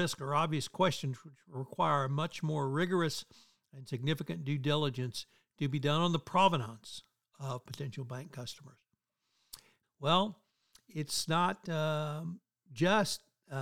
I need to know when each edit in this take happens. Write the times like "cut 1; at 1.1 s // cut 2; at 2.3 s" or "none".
cut 1; at 9.8 s